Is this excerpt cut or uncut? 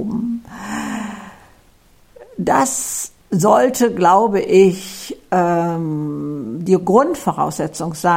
cut